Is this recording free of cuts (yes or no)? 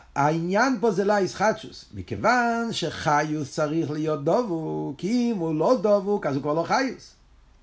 no